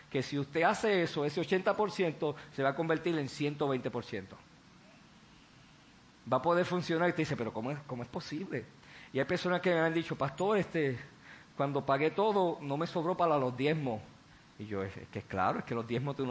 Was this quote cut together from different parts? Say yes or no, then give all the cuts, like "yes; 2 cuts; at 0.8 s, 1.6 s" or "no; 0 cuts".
no; 0 cuts